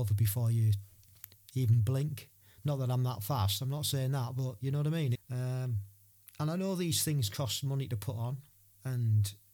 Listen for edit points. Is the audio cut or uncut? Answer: cut